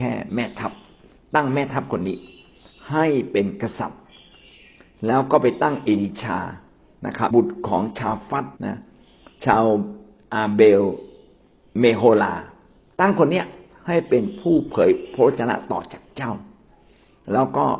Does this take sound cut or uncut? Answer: cut